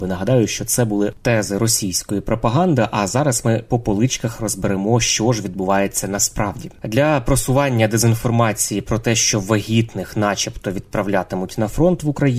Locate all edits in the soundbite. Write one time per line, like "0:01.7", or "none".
0:06.8